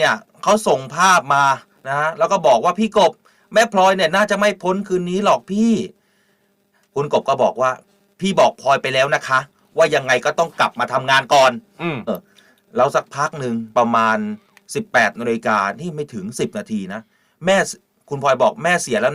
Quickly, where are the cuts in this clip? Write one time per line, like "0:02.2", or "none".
0:12.1
0:13.7